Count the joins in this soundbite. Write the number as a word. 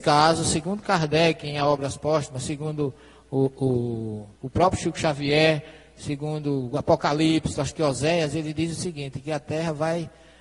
two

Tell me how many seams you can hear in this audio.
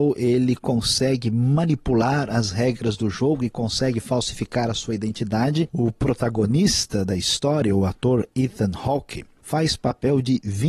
one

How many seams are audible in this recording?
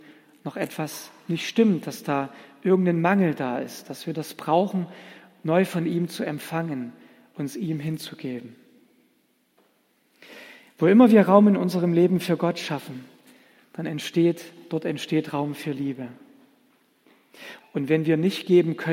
one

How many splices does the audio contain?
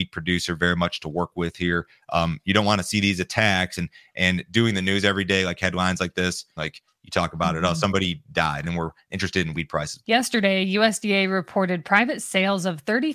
three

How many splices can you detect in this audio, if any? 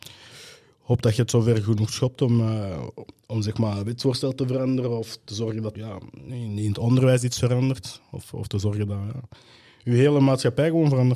one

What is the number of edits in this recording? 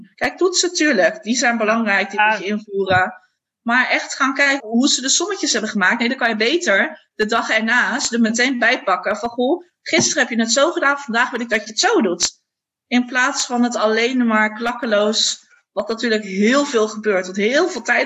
one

